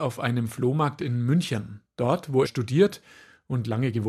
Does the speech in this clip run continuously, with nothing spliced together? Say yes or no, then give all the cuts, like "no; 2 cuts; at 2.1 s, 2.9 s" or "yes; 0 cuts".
no; 1 cut; at 2.4 s